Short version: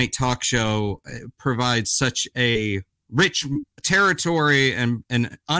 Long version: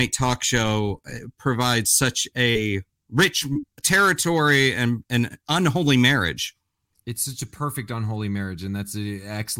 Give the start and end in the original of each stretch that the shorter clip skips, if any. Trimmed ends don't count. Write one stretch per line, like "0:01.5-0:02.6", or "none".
none

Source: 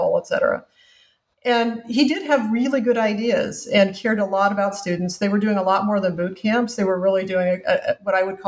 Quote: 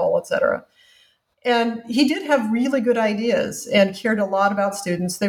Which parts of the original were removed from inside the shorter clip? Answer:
none

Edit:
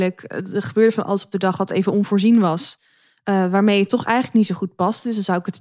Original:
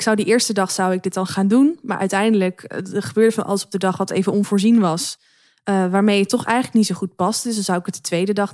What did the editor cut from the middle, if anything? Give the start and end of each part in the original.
none

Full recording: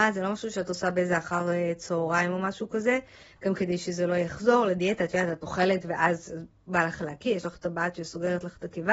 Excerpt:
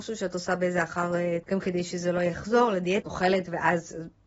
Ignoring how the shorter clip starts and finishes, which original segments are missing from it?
0:01.8-0:03.4
0:05.0-0:05.4

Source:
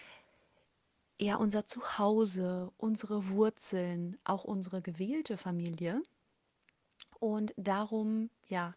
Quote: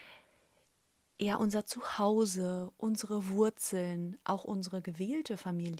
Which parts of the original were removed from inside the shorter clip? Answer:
none

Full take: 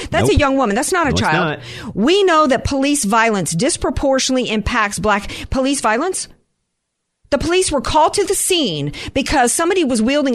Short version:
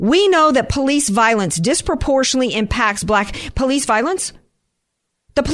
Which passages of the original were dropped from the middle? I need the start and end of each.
none

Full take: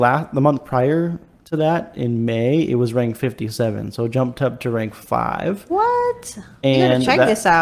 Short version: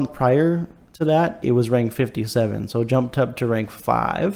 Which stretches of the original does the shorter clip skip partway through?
0:01.9-0:02.7

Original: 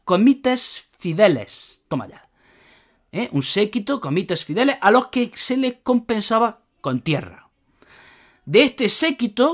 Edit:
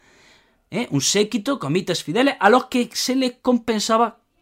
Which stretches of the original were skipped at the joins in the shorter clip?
none

